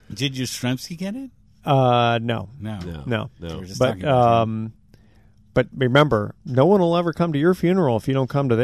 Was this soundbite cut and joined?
no; 0 cuts

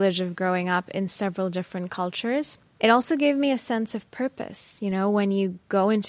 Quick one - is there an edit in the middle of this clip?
yes; 1 cut; at 2.8 s

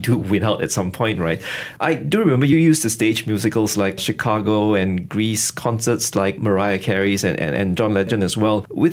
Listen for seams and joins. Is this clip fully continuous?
no; 1 cut; at 1.8 s

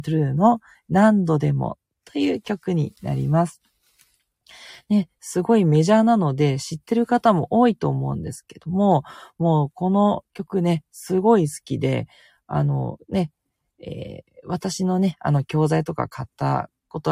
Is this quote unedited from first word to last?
yes; 0 cuts

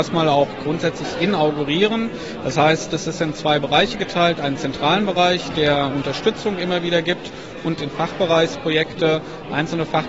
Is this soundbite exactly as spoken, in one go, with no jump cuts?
yes; 0 cuts

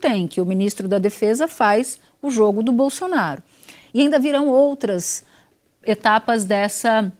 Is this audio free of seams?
no; 1 cut; at 3.9 s

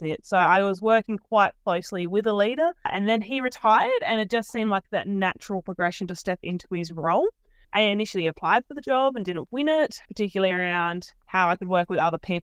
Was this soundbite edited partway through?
yes; 2 cuts; at 7.6 s, 10.1 s

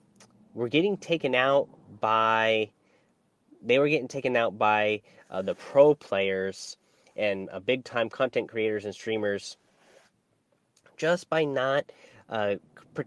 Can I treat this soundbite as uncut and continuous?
yes; 0 cuts

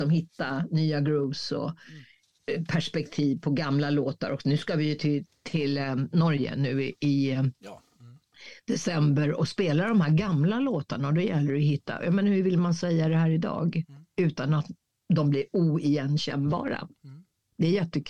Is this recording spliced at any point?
no; 0 cuts

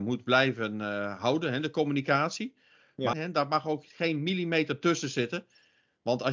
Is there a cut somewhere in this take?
yes; 1 cut; at 3.1 s

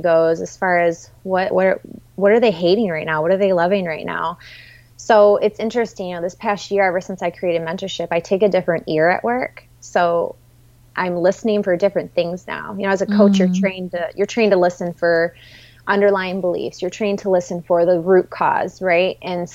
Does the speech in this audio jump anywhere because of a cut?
yes; 1 cut; at 1.5 s

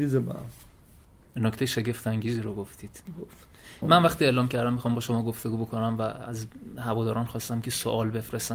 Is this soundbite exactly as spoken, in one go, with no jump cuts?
no; 1 cut; at 3.8 s

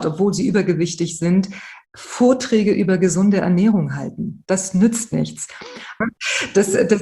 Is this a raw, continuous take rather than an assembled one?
no; 1 cut; at 6.0 s

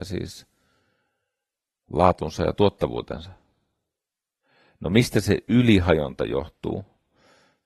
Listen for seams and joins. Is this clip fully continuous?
yes; 0 cuts

